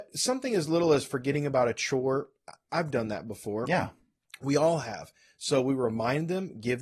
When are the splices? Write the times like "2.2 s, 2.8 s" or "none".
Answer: none